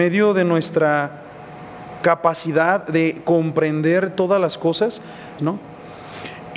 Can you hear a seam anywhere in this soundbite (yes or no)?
yes